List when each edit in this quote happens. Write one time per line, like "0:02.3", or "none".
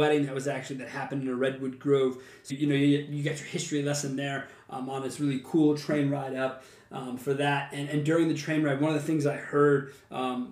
0:02.5